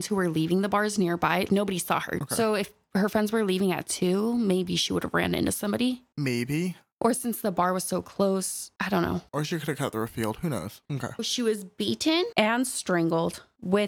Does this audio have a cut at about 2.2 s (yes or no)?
yes